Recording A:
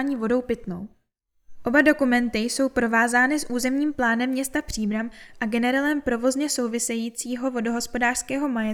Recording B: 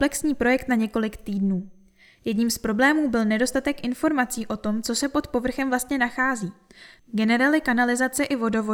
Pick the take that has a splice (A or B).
B